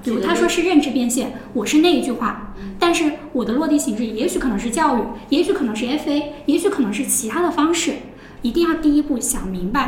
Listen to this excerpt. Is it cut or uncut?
cut